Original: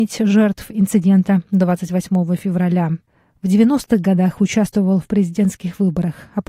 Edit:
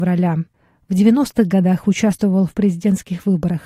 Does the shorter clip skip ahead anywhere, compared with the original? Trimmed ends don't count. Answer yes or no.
no